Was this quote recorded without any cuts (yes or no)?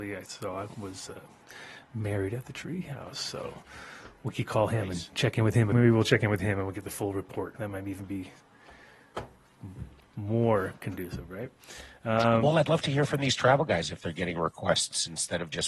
no